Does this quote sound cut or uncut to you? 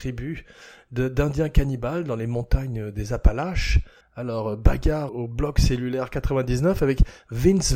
cut